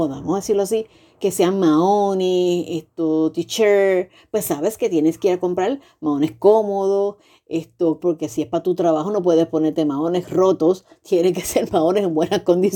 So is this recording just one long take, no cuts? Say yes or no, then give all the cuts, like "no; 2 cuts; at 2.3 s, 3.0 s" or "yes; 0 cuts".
no; 1 cut; at 8.0 s